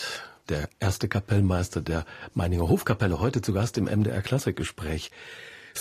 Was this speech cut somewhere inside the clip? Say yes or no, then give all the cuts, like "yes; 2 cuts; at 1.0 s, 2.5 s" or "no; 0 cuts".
no; 0 cuts